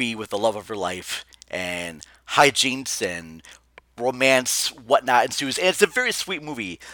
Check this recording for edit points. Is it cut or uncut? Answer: uncut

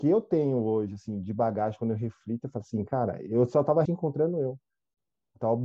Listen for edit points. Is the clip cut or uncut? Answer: cut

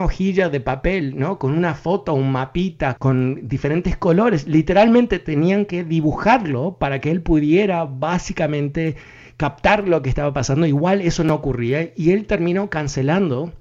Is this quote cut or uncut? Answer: cut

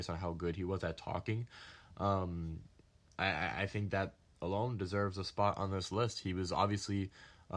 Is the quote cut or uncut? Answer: uncut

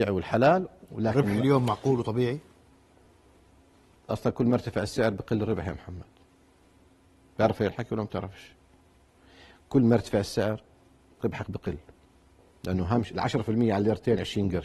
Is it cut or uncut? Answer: uncut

